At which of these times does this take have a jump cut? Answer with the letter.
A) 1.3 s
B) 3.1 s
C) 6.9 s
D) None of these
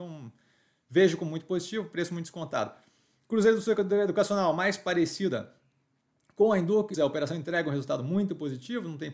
C